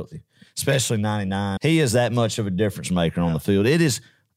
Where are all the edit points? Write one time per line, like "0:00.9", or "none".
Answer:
0:01.6